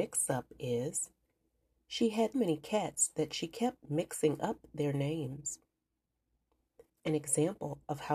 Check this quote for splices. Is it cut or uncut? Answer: cut